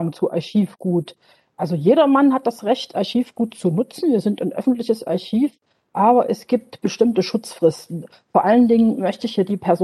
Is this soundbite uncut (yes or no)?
yes